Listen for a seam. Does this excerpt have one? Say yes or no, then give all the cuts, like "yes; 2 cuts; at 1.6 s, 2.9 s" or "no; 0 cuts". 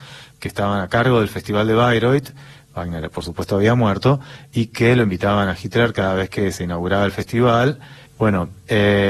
yes; 1 cut; at 8.1 s